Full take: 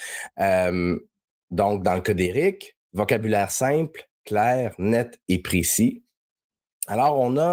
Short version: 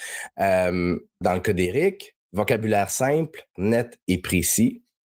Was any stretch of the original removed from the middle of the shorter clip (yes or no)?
yes